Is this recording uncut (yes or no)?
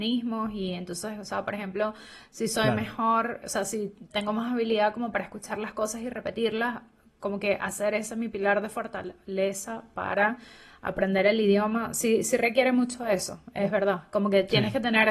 yes